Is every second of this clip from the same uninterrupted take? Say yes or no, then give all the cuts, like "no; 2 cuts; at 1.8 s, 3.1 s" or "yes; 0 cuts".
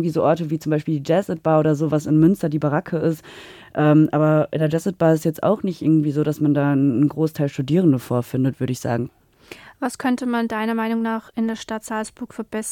yes; 0 cuts